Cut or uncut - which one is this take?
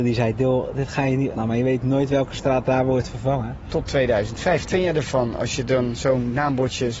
cut